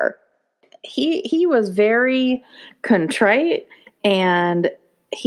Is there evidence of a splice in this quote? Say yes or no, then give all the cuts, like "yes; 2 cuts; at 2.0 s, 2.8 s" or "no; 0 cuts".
no; 0 cuts